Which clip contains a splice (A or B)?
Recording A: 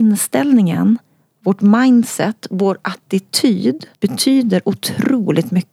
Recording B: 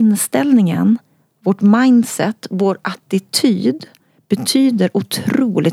A